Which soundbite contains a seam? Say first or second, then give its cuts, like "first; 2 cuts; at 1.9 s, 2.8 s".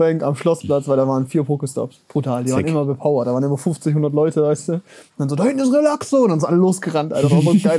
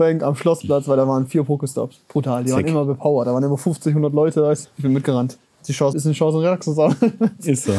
second; 2 cuts; at 4.6 s, 5.9 s